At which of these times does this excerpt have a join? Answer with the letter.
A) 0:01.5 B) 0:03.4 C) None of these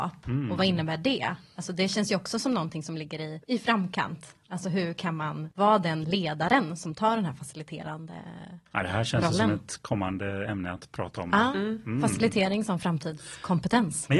B